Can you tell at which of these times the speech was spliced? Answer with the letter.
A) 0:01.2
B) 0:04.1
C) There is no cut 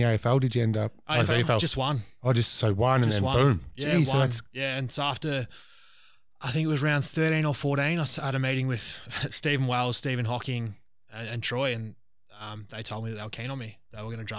A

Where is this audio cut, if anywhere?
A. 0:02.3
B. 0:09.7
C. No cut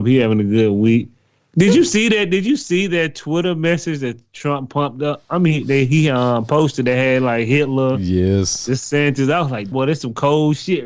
B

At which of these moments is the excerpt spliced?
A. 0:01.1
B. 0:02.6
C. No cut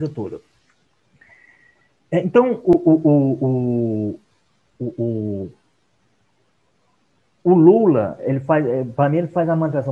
B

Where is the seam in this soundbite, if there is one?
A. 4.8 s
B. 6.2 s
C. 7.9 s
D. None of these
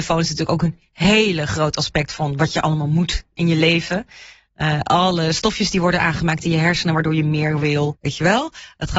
C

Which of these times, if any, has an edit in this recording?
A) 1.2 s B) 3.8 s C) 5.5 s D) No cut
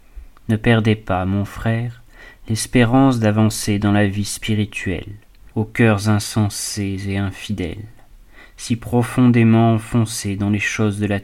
C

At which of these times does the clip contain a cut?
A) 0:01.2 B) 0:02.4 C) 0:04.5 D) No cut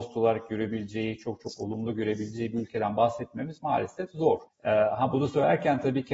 C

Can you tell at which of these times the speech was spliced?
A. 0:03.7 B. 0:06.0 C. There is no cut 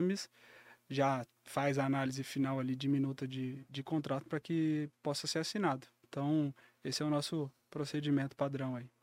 A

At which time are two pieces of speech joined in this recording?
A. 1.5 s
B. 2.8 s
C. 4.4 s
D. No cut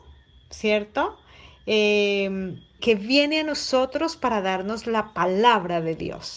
B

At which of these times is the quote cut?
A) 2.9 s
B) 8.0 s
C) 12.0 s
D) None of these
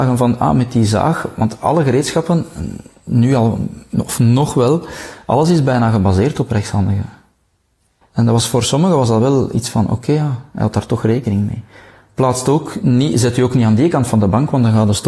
B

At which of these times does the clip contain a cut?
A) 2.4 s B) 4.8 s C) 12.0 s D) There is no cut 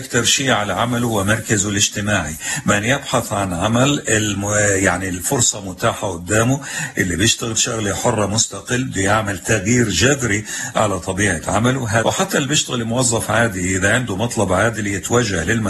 C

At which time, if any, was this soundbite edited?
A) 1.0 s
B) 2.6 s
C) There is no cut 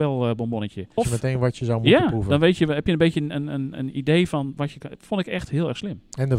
A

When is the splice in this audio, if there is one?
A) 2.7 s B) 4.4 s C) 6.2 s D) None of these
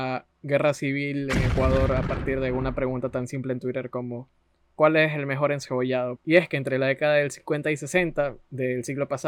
C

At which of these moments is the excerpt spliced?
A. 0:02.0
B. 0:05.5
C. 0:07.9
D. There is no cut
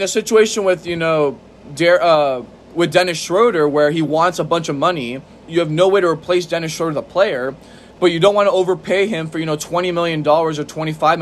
B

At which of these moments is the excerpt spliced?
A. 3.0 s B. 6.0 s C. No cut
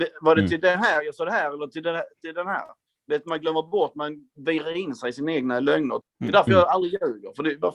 B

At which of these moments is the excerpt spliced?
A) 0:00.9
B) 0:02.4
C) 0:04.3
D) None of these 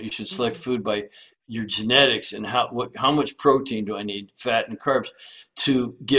D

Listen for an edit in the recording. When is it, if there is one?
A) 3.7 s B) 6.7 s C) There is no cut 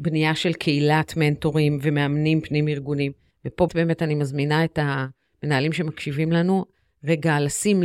A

